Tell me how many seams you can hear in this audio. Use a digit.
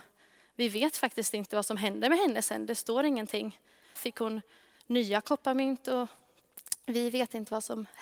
1